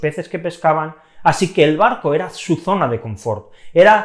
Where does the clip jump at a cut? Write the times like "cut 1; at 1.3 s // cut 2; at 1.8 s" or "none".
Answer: none